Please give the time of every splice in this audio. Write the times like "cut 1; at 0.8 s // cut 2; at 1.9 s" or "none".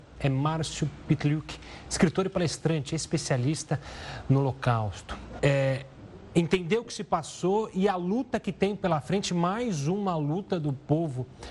cut 1; at 5.4 s